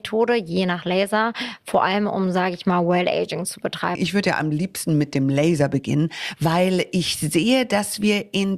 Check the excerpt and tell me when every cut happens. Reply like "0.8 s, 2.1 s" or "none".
4.0 s